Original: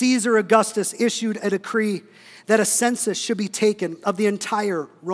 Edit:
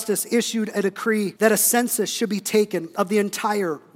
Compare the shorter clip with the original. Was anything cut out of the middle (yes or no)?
yes